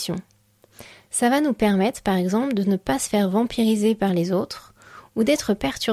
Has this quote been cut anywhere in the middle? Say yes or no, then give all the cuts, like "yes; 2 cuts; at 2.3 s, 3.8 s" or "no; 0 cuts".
no; 0 cuts